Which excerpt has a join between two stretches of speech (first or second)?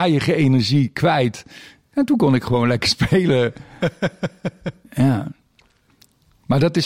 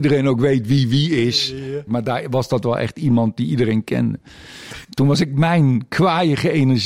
second